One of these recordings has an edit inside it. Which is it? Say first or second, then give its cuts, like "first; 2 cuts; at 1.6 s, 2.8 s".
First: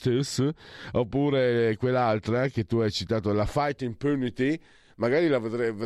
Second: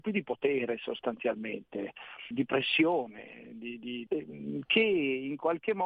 second; 2 cuts; at 2.3 s, 4.1 s